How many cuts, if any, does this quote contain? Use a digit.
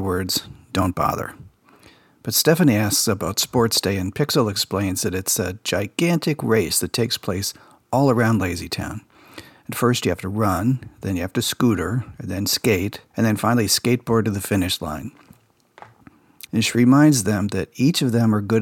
2